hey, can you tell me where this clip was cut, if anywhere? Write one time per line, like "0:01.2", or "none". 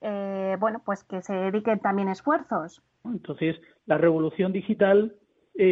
0:03.0